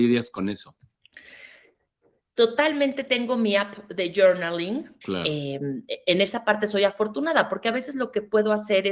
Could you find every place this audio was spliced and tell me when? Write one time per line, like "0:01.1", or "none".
0:05.0